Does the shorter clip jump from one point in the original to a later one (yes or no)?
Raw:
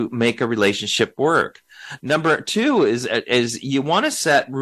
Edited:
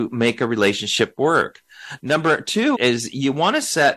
yes